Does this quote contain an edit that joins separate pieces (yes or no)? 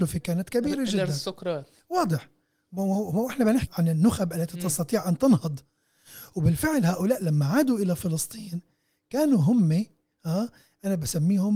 yes